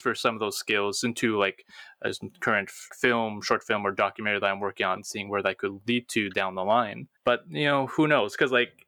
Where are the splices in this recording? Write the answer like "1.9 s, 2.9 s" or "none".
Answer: 2.9 s, 5.0 s, 7.1 s